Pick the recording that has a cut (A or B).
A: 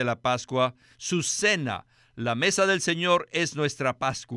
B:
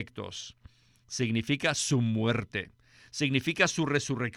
A